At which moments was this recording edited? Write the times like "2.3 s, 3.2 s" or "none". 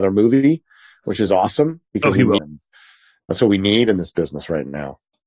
2.4 s